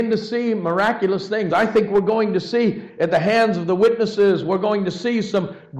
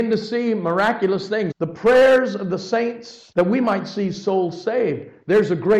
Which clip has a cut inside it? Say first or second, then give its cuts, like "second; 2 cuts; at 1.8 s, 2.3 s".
second; 1 cut; at 1.5 s